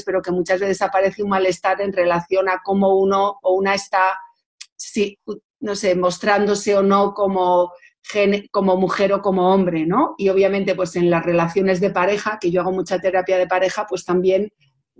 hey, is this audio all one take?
yes; 0 cuts

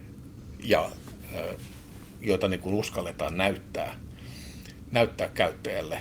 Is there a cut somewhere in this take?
yes; 1 cut; at 2.2 s

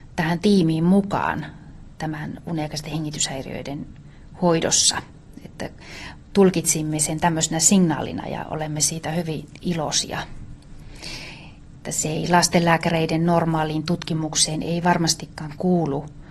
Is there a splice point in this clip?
no; 0 cuts

